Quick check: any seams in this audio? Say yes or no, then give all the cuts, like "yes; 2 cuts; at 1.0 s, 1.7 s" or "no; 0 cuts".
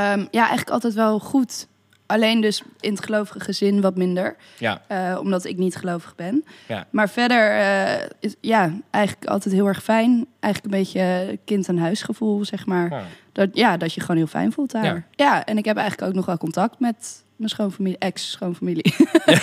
no; 0 cuts